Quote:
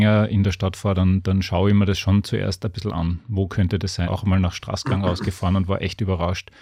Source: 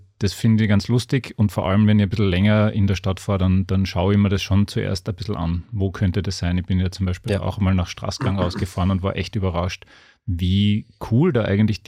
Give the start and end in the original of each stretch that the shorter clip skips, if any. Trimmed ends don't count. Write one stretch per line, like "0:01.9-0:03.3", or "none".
0:06.5-0:07.4